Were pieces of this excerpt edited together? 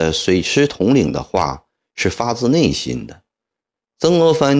no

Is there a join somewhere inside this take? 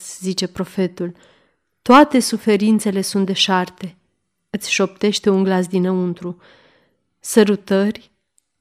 no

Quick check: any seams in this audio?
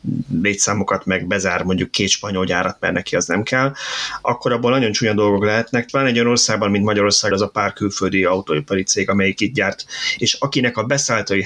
yes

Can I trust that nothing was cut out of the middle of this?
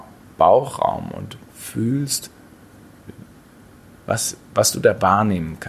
yes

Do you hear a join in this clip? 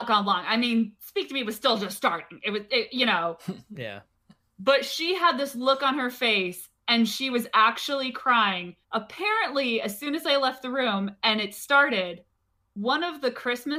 yes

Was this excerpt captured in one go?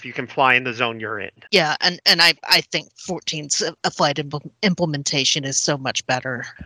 yes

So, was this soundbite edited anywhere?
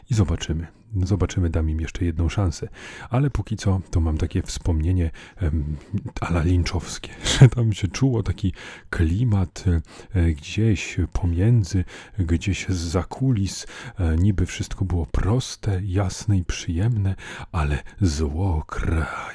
no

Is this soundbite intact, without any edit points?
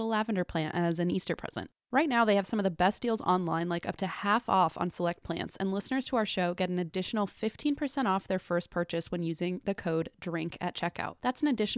yes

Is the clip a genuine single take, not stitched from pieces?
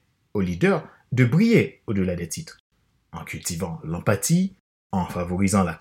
yes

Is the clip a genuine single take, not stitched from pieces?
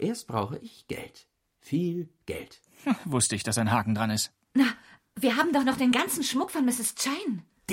yes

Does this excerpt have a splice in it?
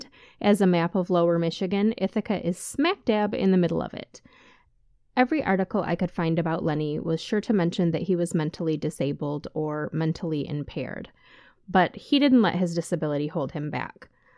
no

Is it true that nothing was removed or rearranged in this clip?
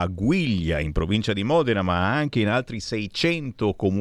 yes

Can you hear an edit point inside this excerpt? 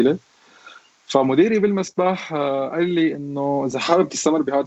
no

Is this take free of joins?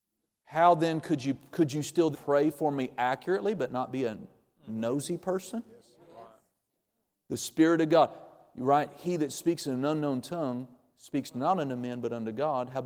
no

